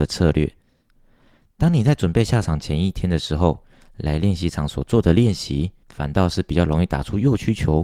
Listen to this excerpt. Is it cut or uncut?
cut